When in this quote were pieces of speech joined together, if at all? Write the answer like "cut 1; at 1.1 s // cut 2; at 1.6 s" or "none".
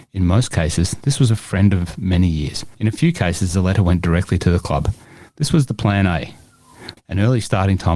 cut 1; at 7.0 s